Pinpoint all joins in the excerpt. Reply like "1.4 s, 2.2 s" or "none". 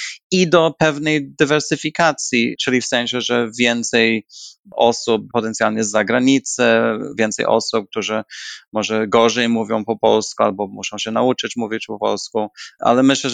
none